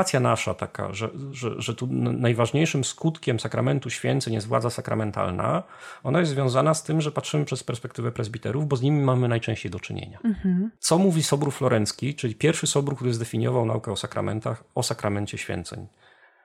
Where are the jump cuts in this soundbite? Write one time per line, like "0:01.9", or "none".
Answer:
none